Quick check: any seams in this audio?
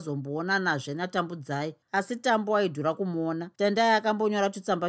yes; 2 cuts; at 1.8 s, 3.5 s

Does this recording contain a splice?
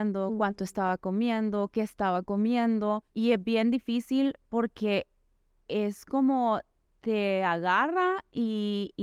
yes; 1 cut; at 3.1 s

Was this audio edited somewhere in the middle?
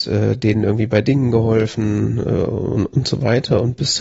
no; 0 cuts

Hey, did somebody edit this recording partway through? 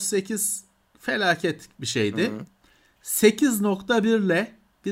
no; 0 cuts

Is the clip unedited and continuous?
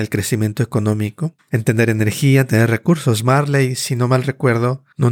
no; 1 cut; at 1.4 s

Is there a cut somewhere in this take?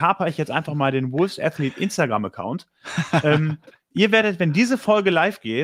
no; 0 cuts

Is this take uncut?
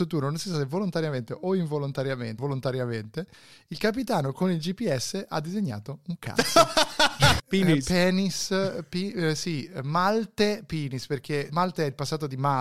no; 3 cuts; at 2.4 s, 7.4 s, 11.5 s

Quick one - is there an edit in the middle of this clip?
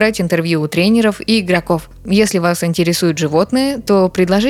no; 0 cuts

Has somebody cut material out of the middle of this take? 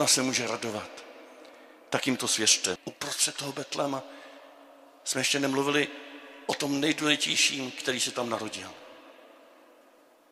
yes; 1 cut; at 2.8 s

